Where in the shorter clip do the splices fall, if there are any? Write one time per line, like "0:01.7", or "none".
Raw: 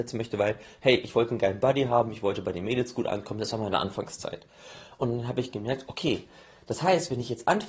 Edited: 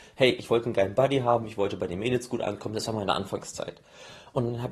none